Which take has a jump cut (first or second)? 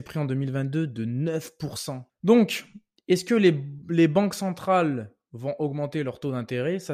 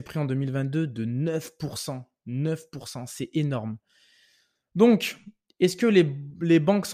first